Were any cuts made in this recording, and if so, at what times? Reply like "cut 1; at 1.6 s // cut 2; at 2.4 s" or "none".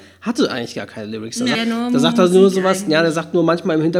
cut 1; at 1.5 s